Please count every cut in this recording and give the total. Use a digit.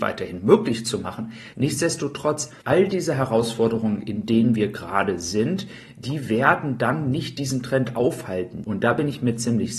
3